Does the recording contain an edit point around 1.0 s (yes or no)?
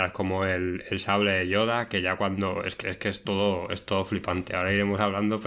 no